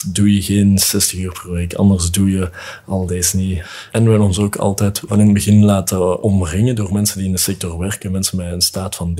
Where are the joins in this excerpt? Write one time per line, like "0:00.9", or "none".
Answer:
none

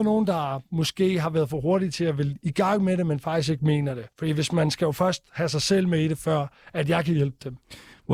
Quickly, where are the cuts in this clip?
0:04.1

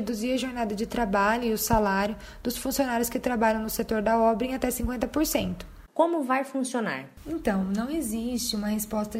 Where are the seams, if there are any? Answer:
0:05.9

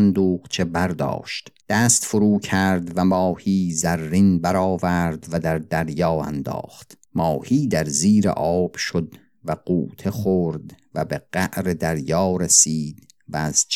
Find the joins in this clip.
0:01.6
0:07.0

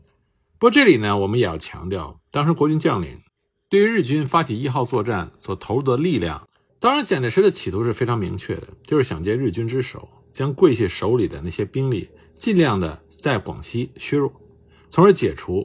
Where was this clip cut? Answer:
0:06.7

